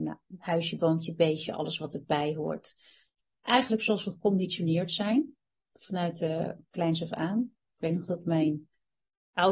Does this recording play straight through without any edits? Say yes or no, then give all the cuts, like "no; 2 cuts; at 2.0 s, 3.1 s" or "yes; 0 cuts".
yes; 0 cuts